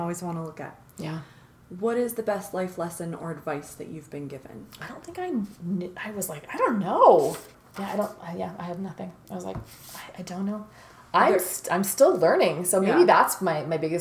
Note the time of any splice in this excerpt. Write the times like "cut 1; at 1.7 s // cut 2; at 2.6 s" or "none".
none